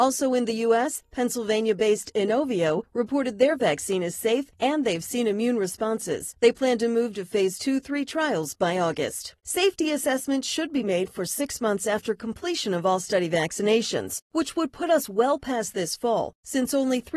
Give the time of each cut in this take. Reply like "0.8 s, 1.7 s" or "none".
9.4 s